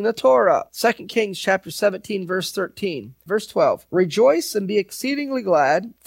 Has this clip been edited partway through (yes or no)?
yes